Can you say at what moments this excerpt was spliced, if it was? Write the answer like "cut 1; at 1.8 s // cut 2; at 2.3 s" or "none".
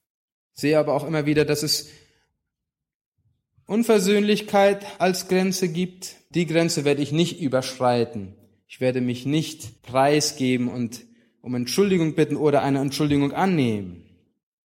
cut 1; at 6.3 s // cut 2; at 9.8 s